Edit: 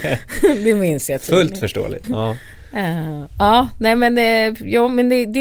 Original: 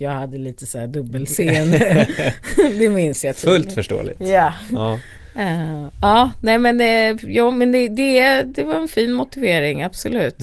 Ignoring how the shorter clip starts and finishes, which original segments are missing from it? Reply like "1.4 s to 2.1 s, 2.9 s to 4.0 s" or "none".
4.2 s to 4.7 s